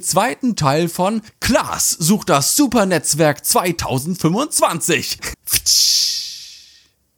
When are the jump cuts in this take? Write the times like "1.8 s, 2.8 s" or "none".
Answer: 5.3 s